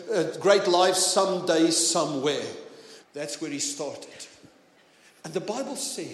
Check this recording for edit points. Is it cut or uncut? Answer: cut